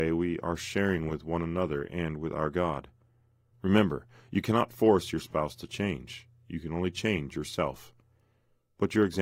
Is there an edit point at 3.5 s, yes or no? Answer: yes